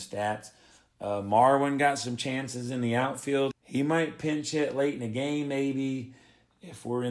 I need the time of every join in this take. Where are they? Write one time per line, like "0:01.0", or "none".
0:03.5

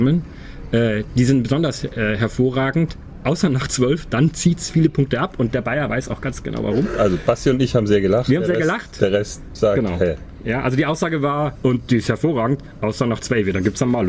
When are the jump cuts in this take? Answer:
0:11.5

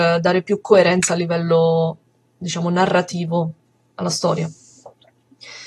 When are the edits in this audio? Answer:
none

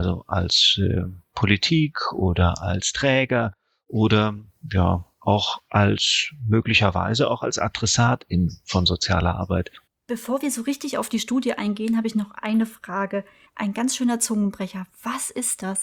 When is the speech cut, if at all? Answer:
0:09.9
0:13.5

